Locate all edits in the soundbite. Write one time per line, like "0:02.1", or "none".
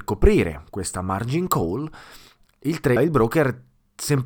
0:03.0